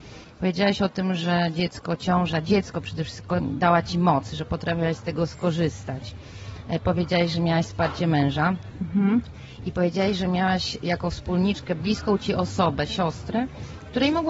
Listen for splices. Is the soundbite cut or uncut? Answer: uncut